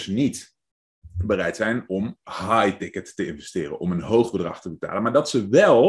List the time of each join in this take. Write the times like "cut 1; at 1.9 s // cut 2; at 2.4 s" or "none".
none